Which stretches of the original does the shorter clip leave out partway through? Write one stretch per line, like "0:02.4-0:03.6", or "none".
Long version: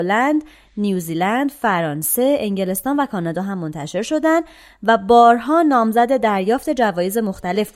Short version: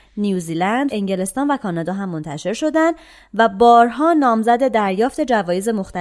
0:01.5-0:02.4